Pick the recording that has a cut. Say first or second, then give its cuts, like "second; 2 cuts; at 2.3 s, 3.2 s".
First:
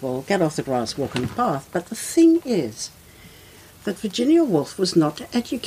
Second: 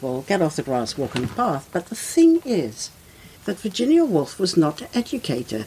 second; 1 cut; at 3.4 s